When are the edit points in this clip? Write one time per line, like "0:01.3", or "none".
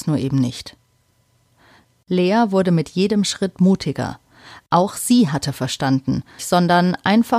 0:06.4